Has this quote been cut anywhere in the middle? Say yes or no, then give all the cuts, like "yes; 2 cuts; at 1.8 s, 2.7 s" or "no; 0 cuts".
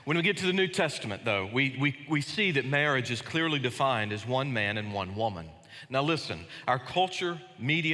no; 0 cuts